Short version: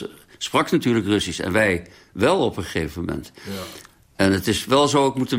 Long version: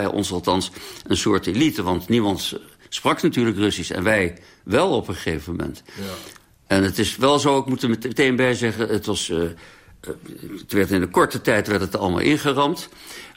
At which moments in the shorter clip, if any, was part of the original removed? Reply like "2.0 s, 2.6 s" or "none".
none